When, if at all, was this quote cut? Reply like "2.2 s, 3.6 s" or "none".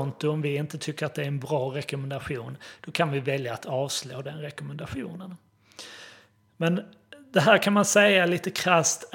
none